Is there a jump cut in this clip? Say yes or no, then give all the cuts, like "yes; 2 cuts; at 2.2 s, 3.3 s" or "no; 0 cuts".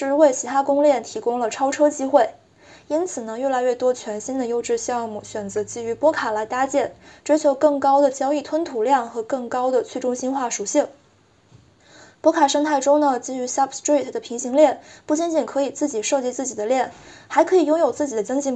no; 0 cuts